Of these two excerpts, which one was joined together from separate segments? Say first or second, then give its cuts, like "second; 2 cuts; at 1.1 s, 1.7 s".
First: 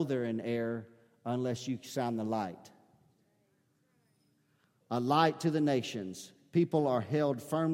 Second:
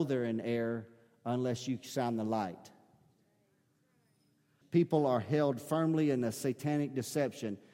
second; 1 cut; at 4.6 s